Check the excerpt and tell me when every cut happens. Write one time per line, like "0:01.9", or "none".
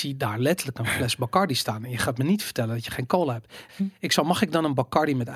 0:03.7